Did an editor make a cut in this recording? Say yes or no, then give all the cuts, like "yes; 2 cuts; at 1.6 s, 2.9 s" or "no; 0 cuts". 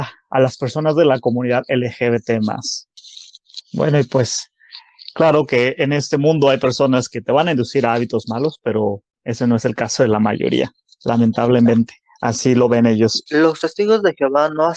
yes; 2 cuts; at 3.6 s, 13.3 s